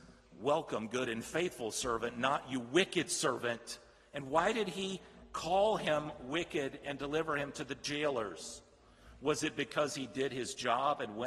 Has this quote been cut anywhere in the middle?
no; 0 cuts

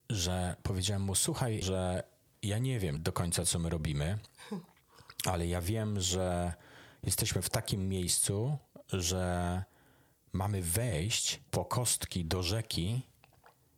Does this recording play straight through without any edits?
no; 3 cuts; at 1.6 s, 3.0 s, 11.5 s

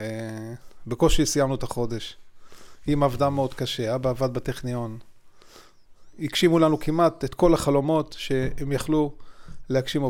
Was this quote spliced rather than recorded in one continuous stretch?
no; 0 cuts

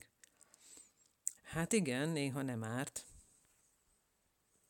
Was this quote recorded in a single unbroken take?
no; 1 cut; at 1.4 s

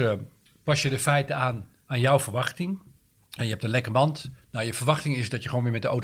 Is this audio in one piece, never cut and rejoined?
yes; 0 cuts

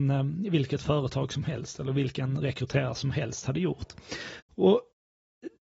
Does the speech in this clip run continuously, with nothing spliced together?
no; 1 cut; at 4.4 s

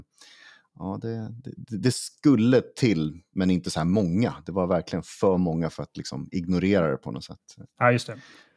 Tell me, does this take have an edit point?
no; 0 cuts

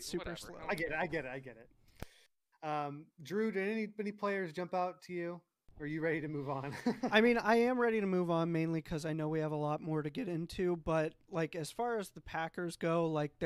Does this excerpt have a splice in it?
no; 0 cuts

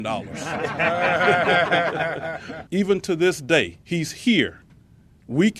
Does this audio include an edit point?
yes; 2 cuts; at 2.7 s, 3.8 s

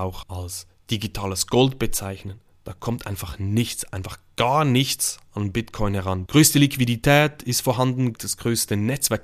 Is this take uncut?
no; 2 cuts; at 6.3 s, 8.1 s

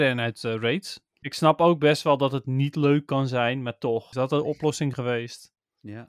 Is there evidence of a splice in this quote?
yes; 2 cuts; at 1.2 s, 4.1 s

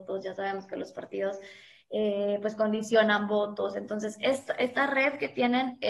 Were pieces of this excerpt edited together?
no; 0 cuts

